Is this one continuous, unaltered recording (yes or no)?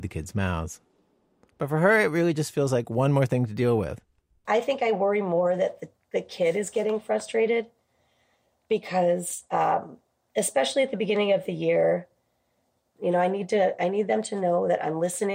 yes